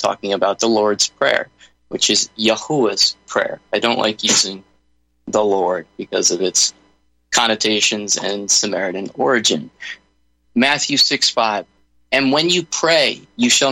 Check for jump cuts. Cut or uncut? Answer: cut